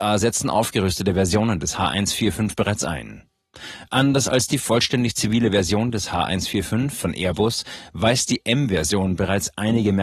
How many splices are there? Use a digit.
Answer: 0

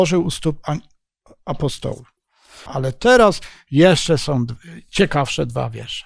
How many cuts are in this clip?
1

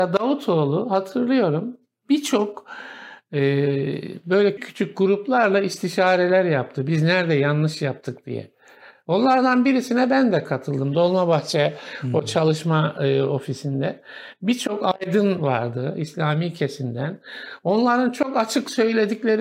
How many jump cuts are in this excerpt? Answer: 1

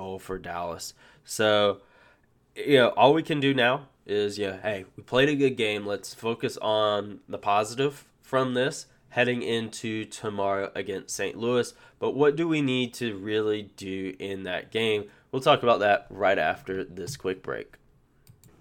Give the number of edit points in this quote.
0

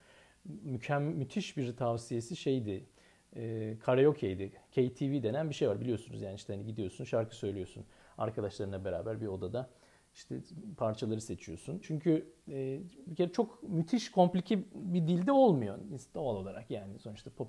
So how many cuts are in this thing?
2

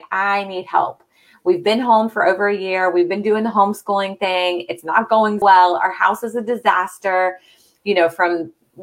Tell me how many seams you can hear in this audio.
1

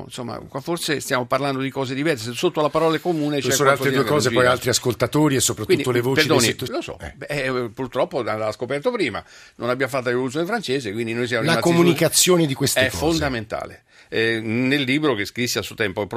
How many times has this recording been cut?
1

